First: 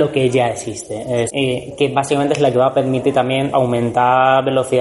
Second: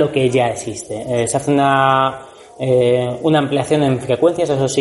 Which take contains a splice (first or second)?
first